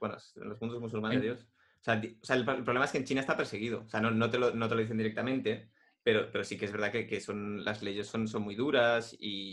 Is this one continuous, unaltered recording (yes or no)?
no